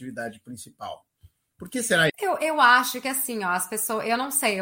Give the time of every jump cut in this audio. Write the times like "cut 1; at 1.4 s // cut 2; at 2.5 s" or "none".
cut 1; at 2.1 s